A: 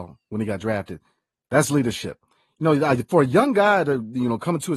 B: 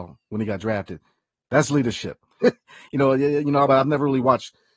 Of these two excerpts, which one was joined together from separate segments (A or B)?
B